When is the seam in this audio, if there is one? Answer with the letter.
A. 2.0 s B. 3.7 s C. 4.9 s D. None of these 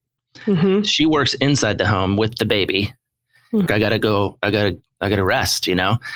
B